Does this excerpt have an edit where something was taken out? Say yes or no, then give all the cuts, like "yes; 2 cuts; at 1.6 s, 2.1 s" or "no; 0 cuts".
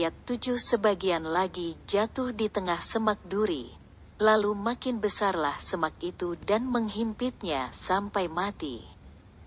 no; 0 cuts